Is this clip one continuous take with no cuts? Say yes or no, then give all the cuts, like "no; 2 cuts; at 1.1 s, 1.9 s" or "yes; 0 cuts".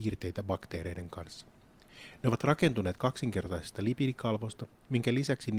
yes; 0 cuts